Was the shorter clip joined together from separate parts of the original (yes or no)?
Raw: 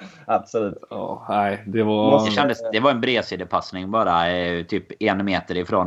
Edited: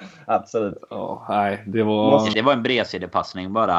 yes